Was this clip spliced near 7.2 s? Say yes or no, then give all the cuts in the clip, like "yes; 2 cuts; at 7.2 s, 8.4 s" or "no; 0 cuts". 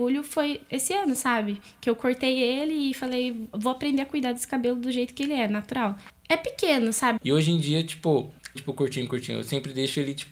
yes; 2 cuts; at 7.2 s, 8.6 s